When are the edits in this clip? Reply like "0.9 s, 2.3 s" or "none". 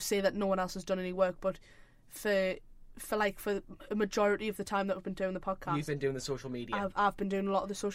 none